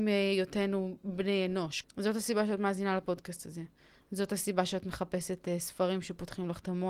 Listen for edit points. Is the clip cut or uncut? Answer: cut